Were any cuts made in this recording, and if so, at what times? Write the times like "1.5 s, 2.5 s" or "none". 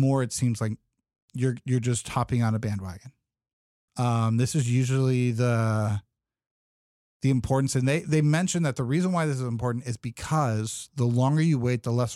3.9 s